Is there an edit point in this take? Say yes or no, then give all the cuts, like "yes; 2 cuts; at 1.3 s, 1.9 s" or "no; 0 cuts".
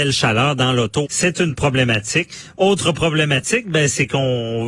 yes; 1 cut; at 1.0 s